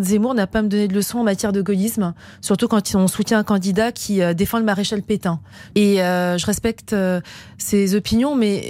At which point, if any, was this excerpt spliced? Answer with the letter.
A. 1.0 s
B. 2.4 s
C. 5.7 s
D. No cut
C